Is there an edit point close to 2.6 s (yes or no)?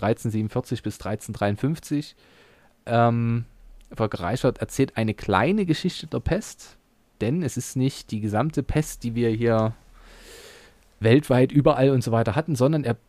no